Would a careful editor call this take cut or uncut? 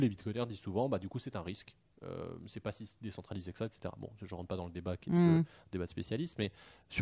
uncut